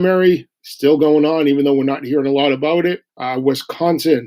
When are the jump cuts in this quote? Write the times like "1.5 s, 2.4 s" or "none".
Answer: 3.1 s